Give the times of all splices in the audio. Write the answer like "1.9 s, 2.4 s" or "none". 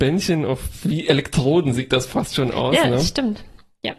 none